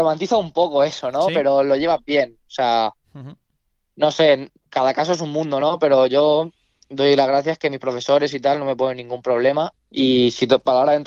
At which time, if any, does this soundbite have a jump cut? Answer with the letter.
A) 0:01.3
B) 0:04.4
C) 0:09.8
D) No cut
C